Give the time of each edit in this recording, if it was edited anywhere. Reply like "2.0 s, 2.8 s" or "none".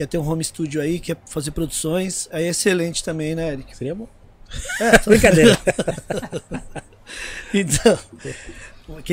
3.7 s